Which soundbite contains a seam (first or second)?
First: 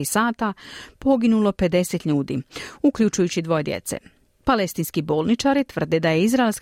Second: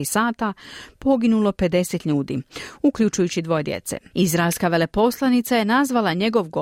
second